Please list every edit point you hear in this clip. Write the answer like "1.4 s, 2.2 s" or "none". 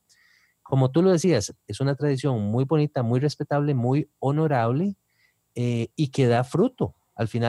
1.6 s